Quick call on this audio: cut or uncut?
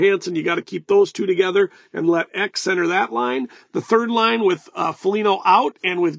uncut